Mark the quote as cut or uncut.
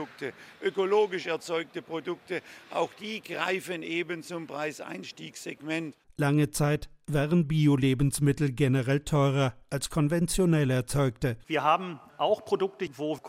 cut